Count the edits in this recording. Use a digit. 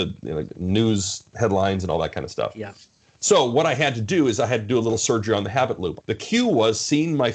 1